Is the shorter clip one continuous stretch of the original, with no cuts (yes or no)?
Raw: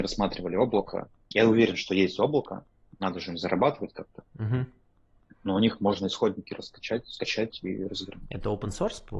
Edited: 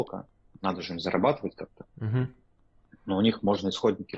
yes